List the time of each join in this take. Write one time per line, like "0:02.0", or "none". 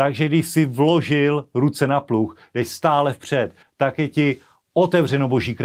0:03.6